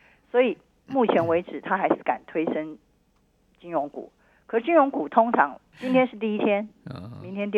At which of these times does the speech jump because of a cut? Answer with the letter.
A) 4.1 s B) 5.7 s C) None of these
B